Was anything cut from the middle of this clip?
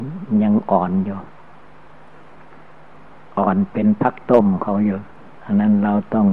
yes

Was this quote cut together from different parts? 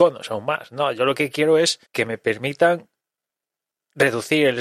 yes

